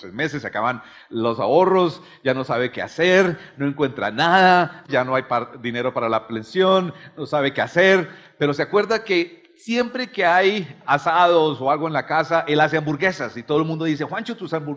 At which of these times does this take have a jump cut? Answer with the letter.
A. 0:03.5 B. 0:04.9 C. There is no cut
B